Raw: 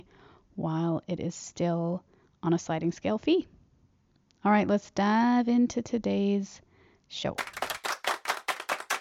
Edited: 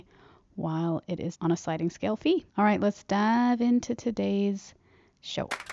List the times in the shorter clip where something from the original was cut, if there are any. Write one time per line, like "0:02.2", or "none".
0:01.3
0:02.5